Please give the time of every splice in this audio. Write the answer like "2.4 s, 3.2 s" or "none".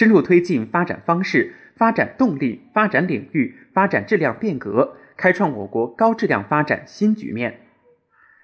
none